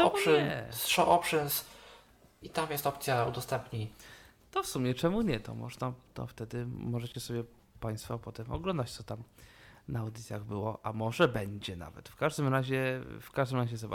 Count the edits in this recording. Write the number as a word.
zero